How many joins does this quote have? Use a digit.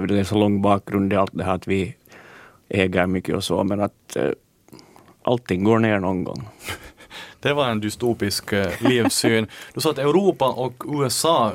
0